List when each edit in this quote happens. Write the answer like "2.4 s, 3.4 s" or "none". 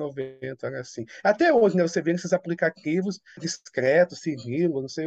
3.4 s